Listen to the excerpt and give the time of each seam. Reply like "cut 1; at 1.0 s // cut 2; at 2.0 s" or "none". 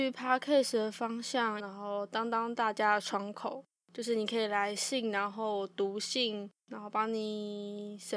cut 1; at 1.6 s // cut 2; at 6.6 s